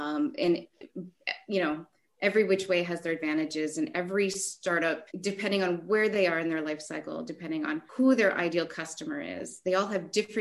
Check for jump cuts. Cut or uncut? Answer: cut